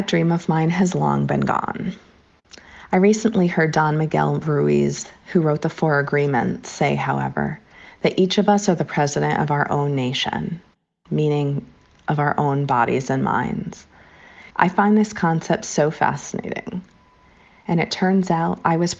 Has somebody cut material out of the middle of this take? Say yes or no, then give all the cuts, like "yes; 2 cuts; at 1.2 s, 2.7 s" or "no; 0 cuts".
yes; 1 cut; at 14.5 s